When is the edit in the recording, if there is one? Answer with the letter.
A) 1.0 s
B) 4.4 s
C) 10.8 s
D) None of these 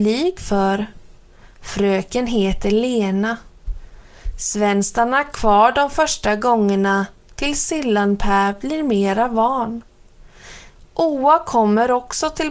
C